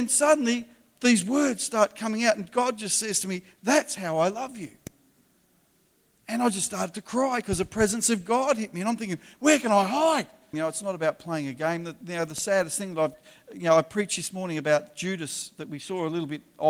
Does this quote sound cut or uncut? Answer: cut